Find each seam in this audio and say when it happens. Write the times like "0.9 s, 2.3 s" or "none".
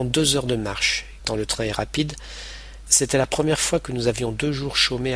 1.2 s, 2.9 s